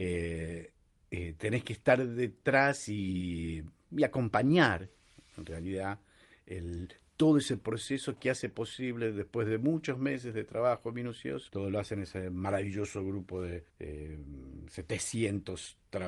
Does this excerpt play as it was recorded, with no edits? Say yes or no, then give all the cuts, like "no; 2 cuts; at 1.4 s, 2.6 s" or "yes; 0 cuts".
no; 2 cuts; at 11.5 s, 13.7 s